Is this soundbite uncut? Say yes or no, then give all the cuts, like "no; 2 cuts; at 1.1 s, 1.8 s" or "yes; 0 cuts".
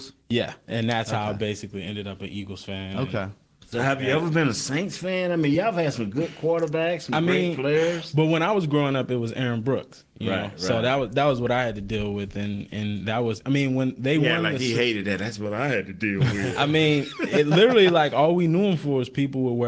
yes; 0 cuts